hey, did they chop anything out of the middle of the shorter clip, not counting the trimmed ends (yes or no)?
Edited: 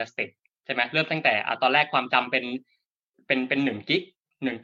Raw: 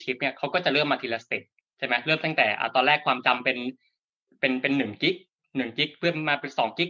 no